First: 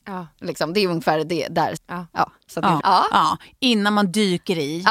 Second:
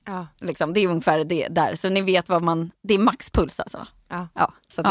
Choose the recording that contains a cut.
first; 2 cuts; at 1.8 s, 2.8 s

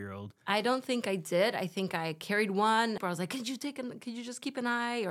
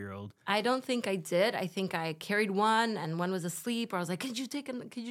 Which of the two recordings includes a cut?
first; 1 cut; at 3.0 s

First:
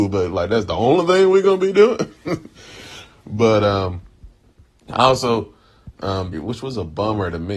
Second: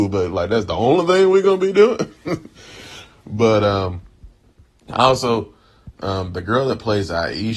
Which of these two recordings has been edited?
first; 1 cut; at 6.3 s

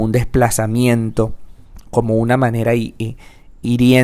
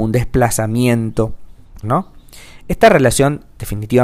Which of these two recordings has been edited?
second; 1 cut; at 1.8 s

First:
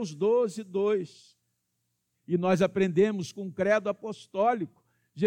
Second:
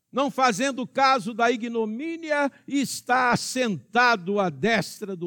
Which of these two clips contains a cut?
first; 1 cut; at 2.1 s

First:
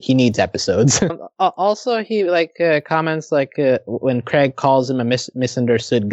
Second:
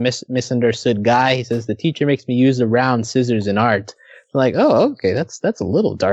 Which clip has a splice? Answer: first; 1 cut; at 1.1 s

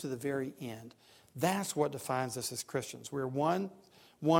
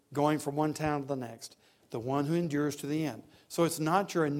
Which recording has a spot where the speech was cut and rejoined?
second; 1 cut; at 1.8 s

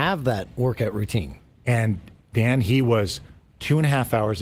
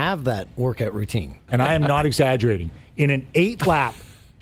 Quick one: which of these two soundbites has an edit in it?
second; 1 cut; at 1.5 s

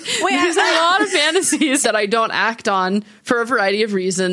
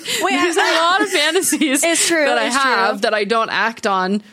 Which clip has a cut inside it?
first; 1 cut; at 1.8 s

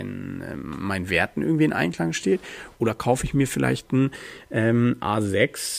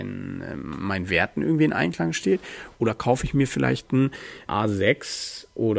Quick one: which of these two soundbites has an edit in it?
second; 1 cut; at 4.5 s

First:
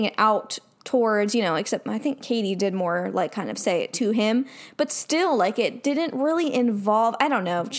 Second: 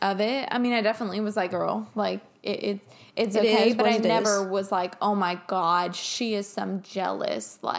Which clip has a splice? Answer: second; 1 cut; at 1.5 s

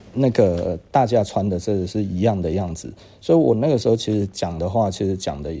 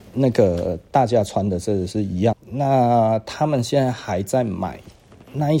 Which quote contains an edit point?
second; 1 cut; at 2.3 s

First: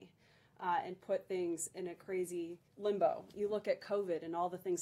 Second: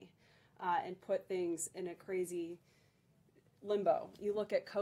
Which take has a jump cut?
first; 1 cut; at 2.7 s

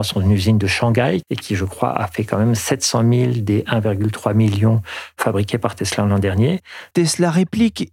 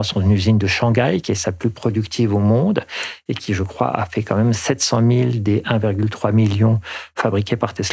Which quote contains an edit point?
first; 2 cuts; at 1.2 s, 6.9 s

